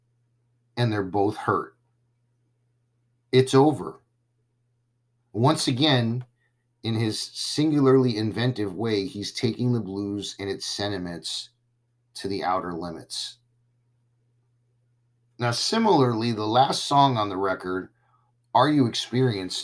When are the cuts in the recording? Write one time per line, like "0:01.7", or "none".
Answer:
none